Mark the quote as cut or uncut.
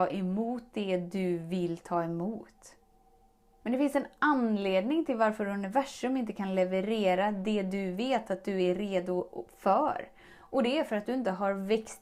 cut